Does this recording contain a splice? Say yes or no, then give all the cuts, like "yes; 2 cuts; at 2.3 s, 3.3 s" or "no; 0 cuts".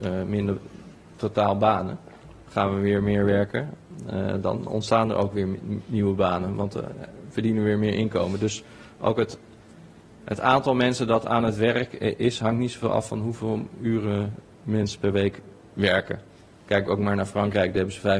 no; 0 cuts